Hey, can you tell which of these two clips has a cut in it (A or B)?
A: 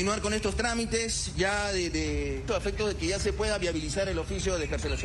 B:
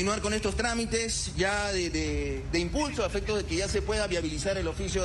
A